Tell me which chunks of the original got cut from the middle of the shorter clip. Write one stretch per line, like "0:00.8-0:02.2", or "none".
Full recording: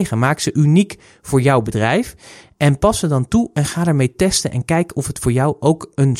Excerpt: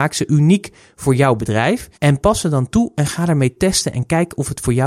0:02.2-0:02.5